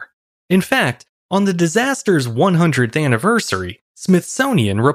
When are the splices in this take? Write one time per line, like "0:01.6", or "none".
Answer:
none